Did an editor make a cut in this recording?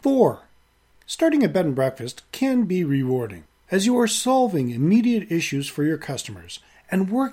yes; 1 cut; at 1.0 s

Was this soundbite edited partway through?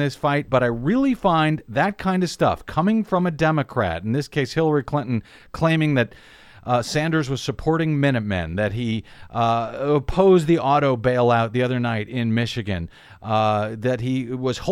no; 0 cuts

